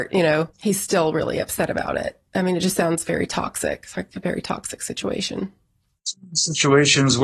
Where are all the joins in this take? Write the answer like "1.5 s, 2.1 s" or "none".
none